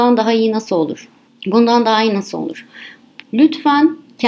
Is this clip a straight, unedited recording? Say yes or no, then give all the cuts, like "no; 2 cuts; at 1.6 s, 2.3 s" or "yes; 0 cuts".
no; 2 cuts; at 1.3 s, 3.2 s